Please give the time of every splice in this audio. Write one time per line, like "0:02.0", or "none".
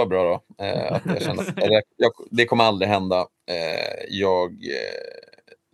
0:01.9

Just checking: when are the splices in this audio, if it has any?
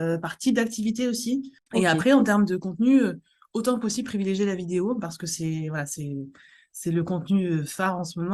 0:01.6

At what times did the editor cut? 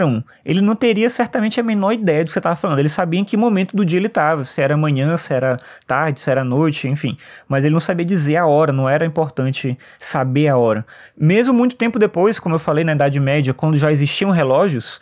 none

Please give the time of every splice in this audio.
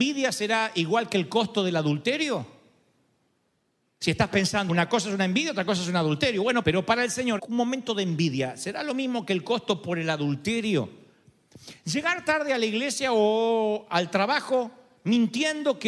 0:04.7
0:07.4

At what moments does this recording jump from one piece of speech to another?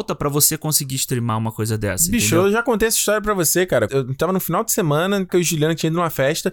0:03.9
0:05.3

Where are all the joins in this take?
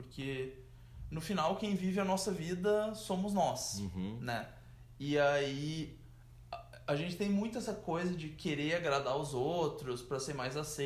none

